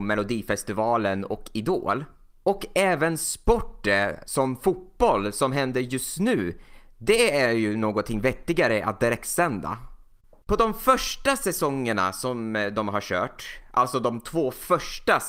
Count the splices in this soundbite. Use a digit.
1